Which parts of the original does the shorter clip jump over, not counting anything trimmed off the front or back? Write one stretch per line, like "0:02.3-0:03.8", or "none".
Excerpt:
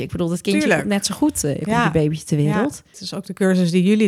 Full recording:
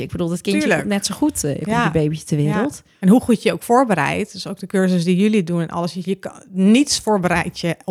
0:02.9-0:04.3